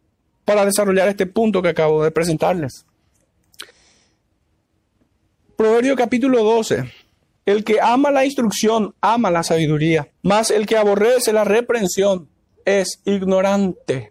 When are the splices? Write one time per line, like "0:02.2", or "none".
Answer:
0:07.4
0:10.2